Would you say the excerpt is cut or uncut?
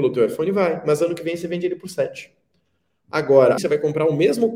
cut